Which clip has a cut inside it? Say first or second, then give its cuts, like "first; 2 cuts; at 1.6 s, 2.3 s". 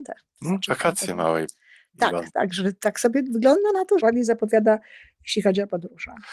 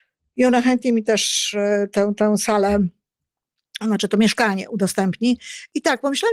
first; 2 cuts; at 2.3 s, 4.0 s